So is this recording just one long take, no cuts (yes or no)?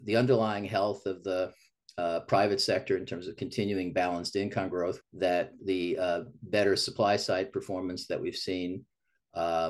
no